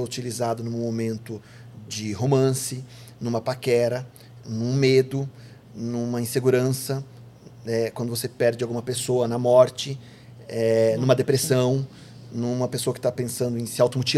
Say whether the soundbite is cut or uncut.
cut